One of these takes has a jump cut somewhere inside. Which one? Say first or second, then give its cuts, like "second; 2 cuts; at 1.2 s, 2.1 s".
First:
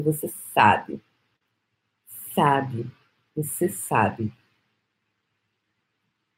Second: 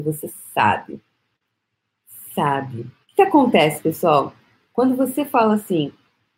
second; 1 cut; at 3.0 s